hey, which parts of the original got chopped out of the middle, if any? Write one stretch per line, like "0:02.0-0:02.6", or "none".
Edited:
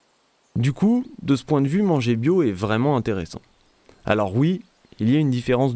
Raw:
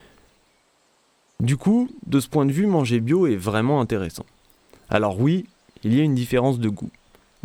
none